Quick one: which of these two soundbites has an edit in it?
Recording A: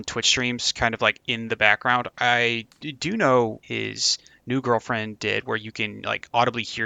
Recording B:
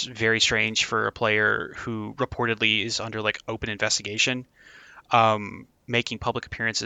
A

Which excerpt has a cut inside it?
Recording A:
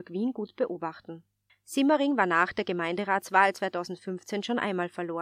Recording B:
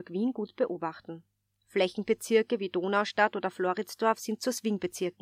A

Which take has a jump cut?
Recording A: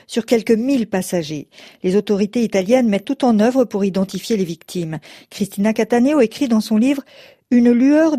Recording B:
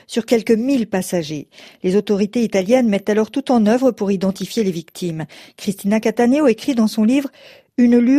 A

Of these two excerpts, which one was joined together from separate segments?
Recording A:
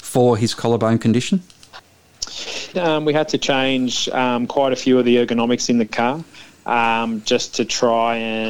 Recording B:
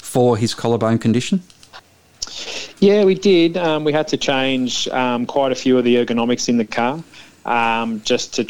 A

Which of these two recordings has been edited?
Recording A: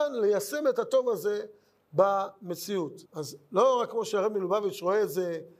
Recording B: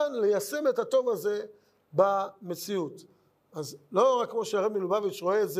A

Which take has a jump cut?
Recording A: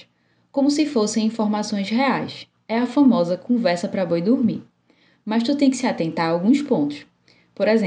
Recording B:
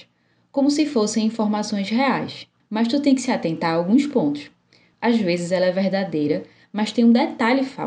B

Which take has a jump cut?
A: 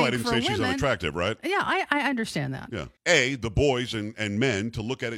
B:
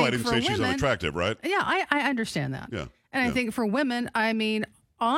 A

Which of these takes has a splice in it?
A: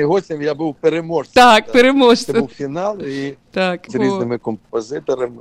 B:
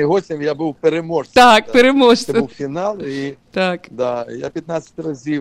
A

